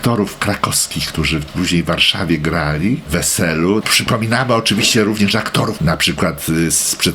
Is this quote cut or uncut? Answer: cut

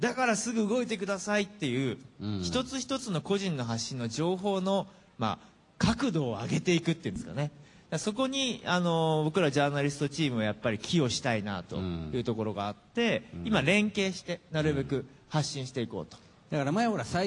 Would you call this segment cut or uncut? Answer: uncut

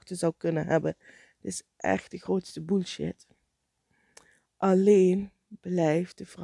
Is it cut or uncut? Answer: uncut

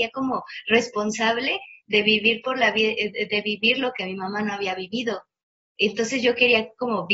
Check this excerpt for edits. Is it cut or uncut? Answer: uncut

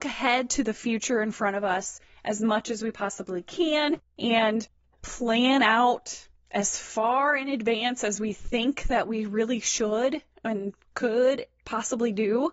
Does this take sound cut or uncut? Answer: uncut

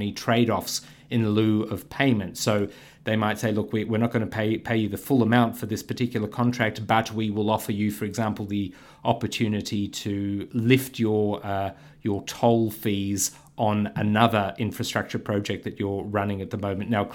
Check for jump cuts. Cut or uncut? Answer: uncut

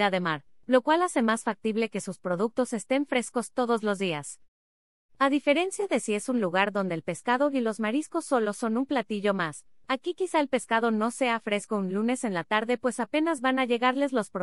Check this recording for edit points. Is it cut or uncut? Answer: uncut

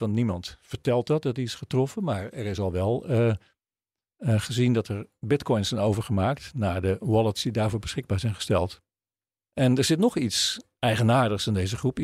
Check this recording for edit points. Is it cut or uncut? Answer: uncut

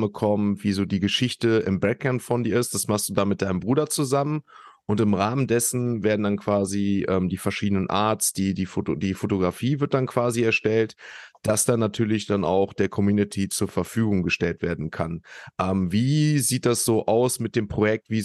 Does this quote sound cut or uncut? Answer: uncut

